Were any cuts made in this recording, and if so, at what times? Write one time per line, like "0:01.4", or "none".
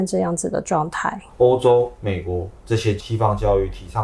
0:01.3